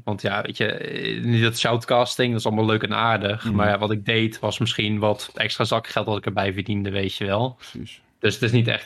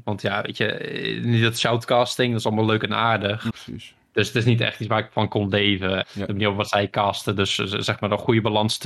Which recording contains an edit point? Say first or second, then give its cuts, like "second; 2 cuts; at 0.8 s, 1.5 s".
second; 2 cuts; at 3.5 s, 6.0 s